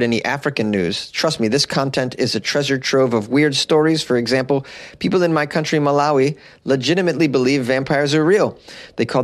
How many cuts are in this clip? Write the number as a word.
zero